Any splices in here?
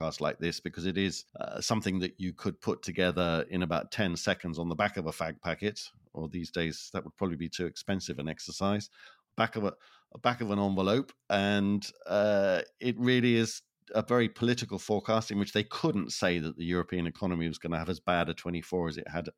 yes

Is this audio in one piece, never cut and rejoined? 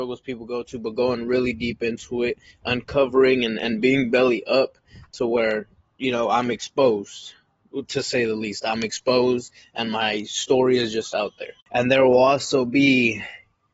yes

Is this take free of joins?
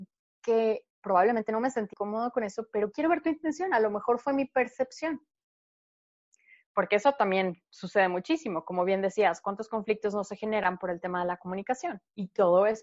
no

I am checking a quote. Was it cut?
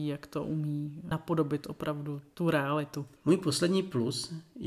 yes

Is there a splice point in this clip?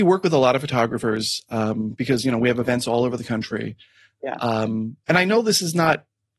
no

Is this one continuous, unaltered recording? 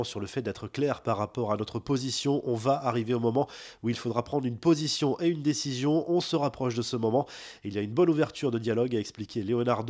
yes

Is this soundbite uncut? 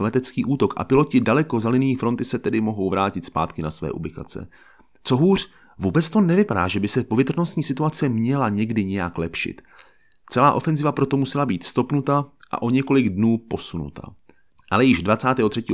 yes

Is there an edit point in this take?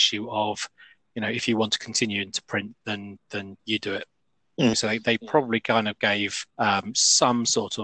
yes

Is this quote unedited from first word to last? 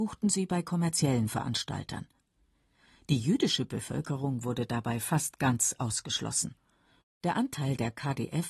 no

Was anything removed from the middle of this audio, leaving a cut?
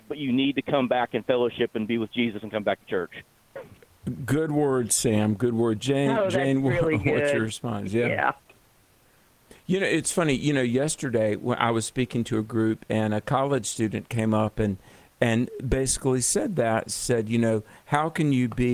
no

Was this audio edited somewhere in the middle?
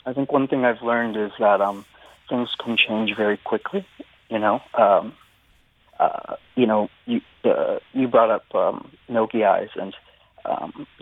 no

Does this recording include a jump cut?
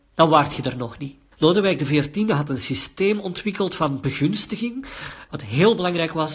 yes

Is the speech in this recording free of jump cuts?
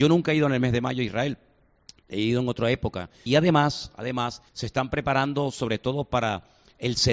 no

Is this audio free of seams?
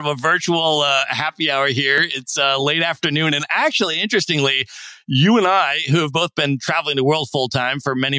yes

